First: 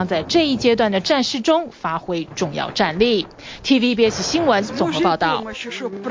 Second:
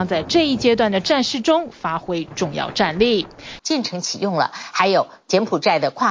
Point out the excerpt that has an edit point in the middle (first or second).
second